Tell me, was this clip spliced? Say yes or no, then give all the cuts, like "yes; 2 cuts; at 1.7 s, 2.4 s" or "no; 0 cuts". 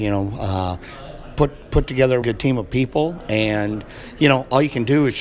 yes; 1 cut; at 2.2 s